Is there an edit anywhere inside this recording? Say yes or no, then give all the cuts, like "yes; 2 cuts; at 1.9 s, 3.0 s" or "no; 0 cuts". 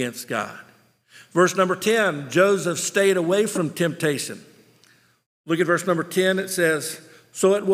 no; 0 cuts